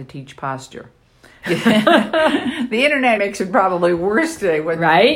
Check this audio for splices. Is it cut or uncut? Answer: cut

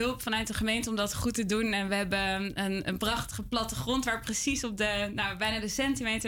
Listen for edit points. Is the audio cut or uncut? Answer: uncut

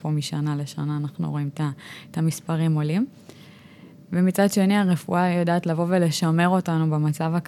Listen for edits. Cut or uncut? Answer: uncut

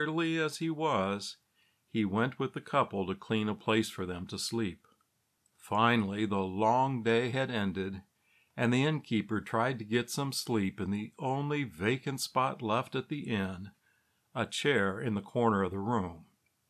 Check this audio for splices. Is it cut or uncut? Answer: uncut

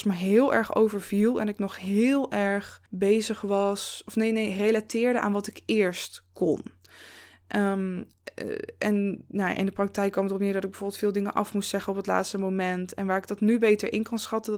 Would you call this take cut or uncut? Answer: cut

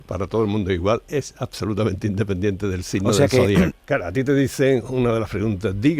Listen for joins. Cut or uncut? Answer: cut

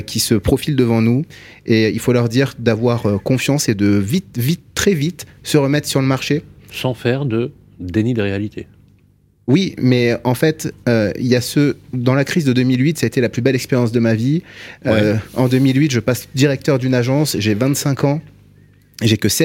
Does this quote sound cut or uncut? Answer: uncut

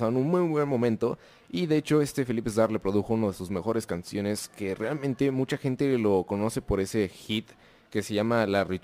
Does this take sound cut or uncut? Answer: uncut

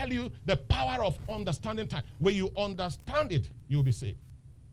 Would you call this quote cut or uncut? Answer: uncut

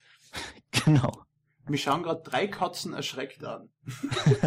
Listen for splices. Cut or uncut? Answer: uncut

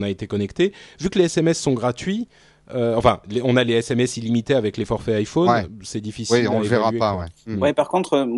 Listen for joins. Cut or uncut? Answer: uncut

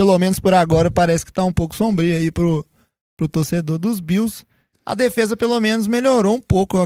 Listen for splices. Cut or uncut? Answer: cut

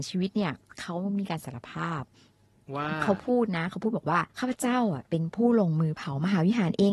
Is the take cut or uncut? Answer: cut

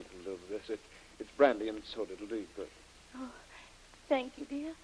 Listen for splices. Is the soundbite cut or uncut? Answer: uncut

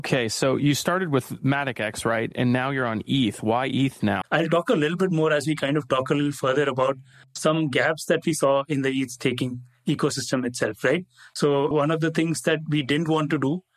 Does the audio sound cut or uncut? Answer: cut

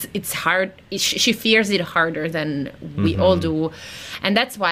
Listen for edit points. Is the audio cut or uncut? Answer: uncut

